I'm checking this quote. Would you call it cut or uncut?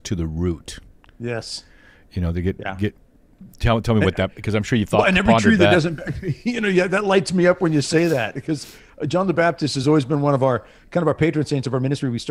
uncut